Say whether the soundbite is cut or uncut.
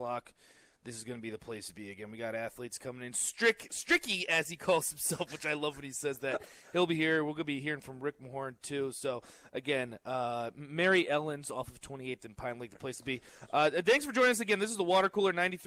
uncut